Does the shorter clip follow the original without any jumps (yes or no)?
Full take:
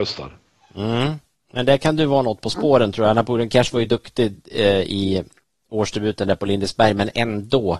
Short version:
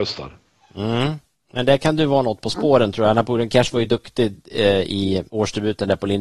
no